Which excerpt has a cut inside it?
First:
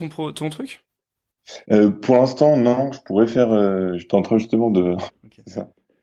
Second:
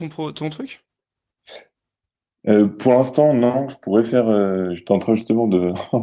first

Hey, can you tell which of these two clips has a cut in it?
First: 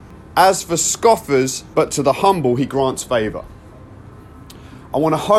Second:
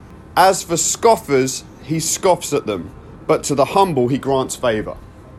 first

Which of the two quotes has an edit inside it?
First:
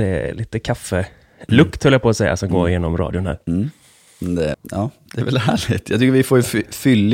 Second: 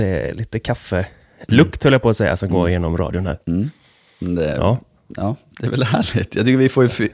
first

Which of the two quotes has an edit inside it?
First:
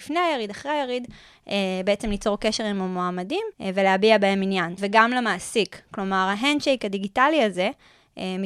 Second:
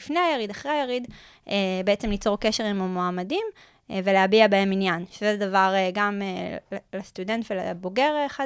first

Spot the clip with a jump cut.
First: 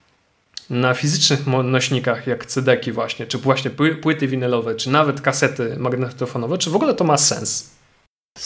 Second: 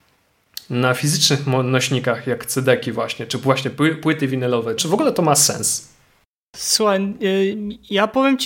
second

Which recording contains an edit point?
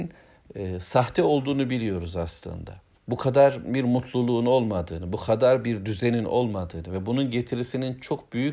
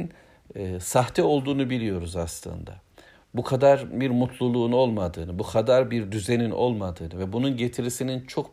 first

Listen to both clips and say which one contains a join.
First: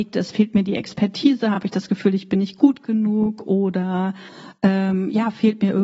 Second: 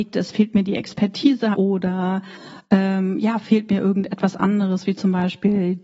second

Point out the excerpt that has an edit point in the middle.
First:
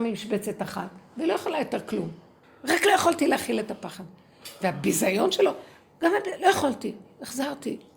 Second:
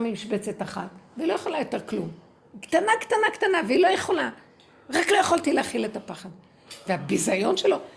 first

